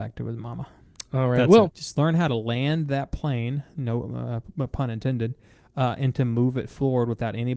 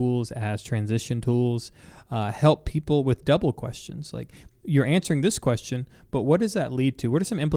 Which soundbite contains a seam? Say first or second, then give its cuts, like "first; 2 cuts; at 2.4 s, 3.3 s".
first; 1 cut; at 1.7 s